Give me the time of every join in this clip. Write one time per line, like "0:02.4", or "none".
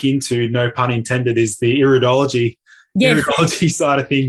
none